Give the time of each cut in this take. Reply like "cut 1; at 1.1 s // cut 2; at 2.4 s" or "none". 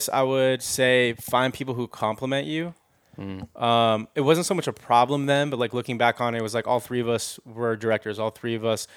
none